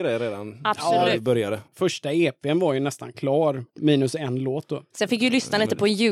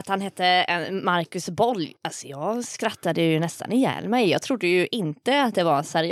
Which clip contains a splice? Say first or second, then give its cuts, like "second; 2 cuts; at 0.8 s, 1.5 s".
first; 2 cuts; at 1.7 s, 3.7 s